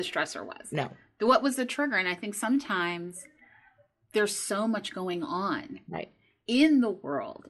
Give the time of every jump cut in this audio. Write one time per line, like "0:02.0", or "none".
none